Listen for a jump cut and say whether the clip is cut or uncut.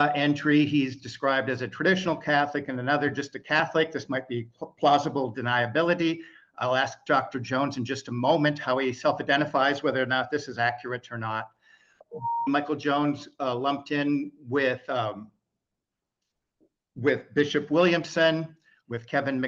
cut